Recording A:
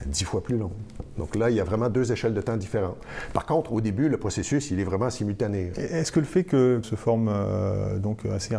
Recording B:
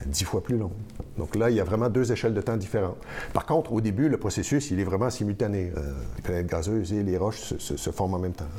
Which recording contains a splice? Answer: A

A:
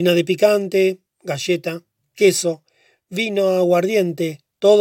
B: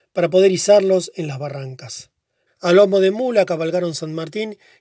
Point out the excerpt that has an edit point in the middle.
B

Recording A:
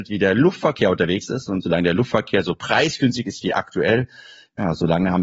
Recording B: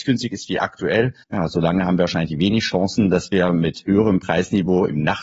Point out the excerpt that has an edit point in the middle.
B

